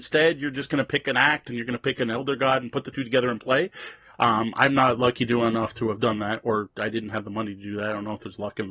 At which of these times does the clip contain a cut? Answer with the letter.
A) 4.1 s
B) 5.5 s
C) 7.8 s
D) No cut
A